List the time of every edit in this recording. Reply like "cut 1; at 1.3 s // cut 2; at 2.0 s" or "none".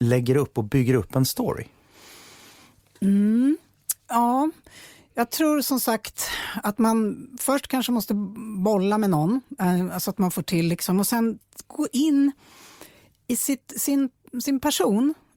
cut 1; at 4.0 s